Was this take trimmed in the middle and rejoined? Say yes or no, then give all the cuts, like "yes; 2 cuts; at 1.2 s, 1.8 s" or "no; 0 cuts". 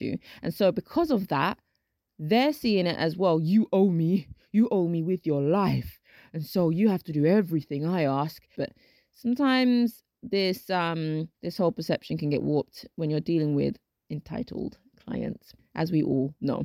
yes; 2 cuts; at 8.5 s, 11.3 s